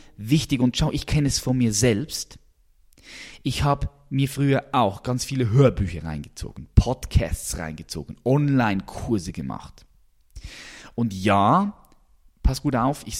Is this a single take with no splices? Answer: yes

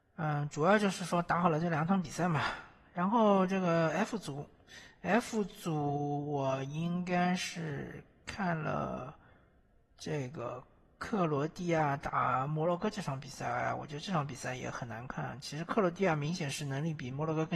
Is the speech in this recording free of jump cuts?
no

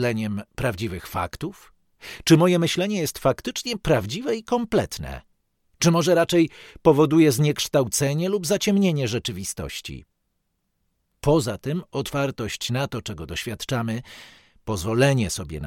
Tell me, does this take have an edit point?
no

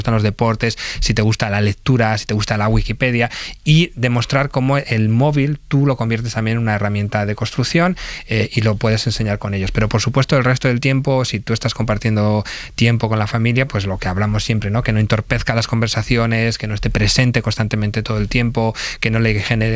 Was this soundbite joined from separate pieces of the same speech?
no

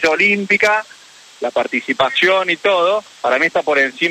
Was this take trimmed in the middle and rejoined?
yes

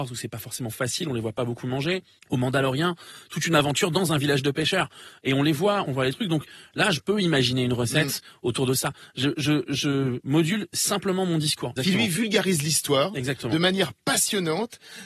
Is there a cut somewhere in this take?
yes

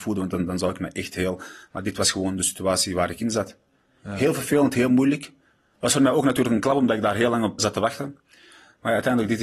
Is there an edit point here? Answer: yes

